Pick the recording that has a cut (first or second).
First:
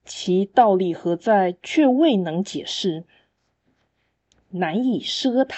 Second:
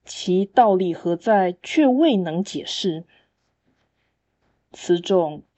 first